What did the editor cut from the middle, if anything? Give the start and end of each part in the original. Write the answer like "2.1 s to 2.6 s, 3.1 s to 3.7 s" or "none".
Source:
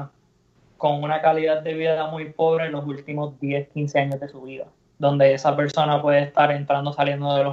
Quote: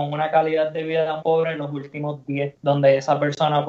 2.1 s to 2.3 s, 3.7 s to 4.9 s